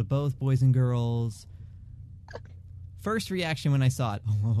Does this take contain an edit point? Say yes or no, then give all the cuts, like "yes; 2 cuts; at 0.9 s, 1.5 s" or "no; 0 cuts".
yes; 1 cut; at 2.3 s